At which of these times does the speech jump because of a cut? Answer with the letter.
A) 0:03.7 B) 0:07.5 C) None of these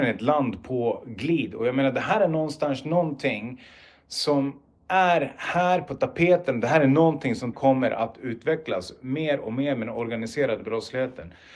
B